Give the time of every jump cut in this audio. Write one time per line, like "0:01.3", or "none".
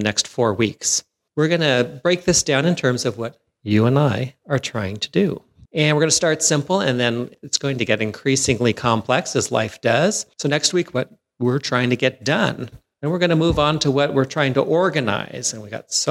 0:10.9